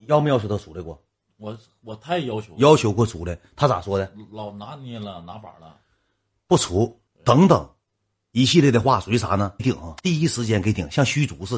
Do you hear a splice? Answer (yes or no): yes